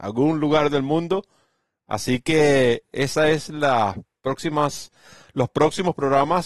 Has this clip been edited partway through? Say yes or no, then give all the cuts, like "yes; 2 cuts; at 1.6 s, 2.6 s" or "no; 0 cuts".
yes; 1 cut; at 2.9 s